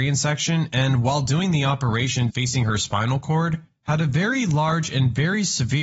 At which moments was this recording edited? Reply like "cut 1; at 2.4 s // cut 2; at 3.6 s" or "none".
cut 1; at 2.3 s